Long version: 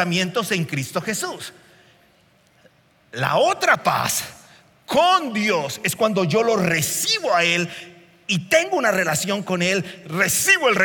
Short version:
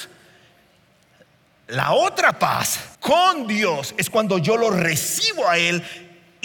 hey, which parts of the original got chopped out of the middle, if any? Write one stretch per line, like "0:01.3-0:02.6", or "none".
0:04.4-0:04.8